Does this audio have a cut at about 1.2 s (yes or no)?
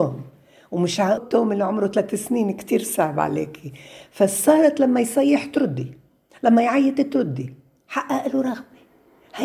yes